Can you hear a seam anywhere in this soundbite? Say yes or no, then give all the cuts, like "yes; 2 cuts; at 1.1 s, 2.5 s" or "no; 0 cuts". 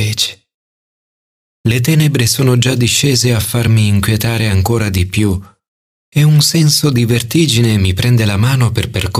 no; 0 cuts